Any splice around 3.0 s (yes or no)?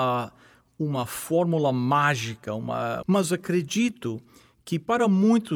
yes